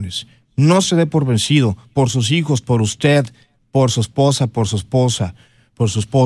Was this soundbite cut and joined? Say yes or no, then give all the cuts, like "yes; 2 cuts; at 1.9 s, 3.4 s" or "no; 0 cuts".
no; 0 cuts